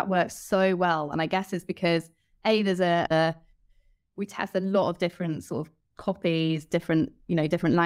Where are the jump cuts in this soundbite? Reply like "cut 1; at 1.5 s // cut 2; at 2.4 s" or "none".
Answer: cut 1; at 3.1 s